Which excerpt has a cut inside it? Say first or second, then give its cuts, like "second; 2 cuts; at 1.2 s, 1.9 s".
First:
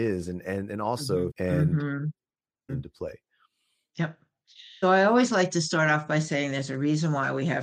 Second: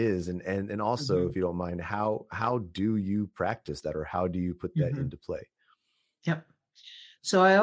first; 3 cuts; at 1.3 s, 2.7 s, 4.8 s